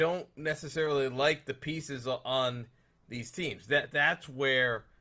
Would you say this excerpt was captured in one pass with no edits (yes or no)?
yes